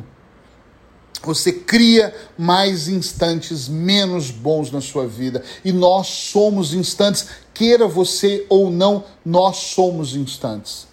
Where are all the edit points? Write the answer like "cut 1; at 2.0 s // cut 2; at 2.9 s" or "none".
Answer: none